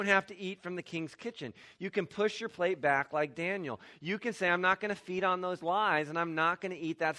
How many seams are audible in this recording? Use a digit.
0